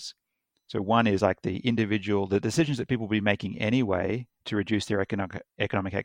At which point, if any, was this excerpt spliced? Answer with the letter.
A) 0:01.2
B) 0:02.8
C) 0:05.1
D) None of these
D